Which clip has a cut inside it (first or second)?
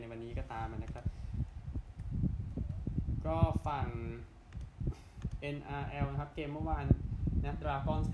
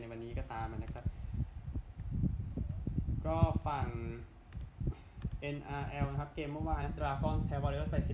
second